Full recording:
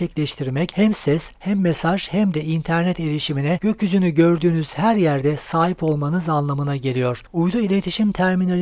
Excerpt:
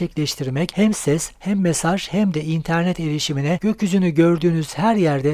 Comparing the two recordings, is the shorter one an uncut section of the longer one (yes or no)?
yes